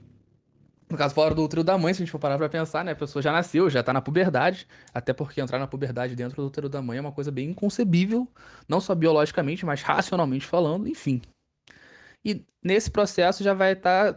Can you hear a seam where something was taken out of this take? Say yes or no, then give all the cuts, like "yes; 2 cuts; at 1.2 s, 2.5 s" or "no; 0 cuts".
no; 0 cuts